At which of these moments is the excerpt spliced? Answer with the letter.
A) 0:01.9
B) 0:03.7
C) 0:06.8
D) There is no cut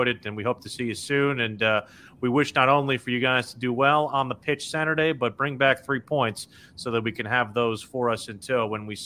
D